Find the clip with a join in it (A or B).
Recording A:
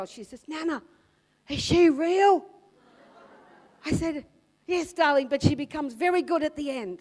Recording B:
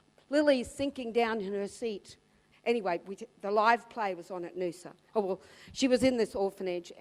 B